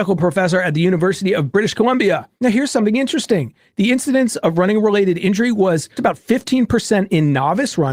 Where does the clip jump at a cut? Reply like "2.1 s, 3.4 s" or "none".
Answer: 2.4 s, 6.0 s